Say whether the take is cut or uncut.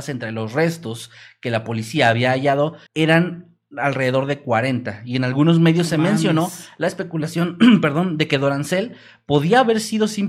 cut